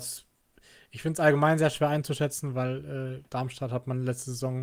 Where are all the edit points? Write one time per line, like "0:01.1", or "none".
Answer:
0:03.3